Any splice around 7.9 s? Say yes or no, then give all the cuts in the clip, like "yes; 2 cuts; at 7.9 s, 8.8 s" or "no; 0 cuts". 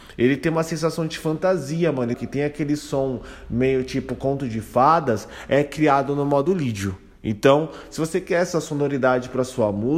no; 1 cut; at 2.1 s